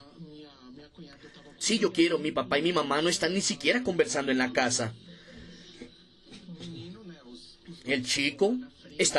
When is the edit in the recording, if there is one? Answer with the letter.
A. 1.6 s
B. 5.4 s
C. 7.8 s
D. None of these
A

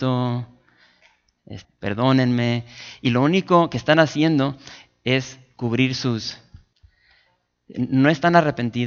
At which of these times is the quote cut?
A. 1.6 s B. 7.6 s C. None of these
A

